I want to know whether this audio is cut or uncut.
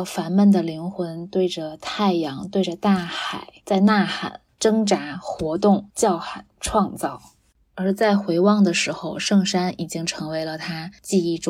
uncut